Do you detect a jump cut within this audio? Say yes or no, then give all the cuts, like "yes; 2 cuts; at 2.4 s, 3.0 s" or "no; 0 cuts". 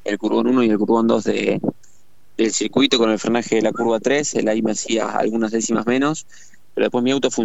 no; 0 cuts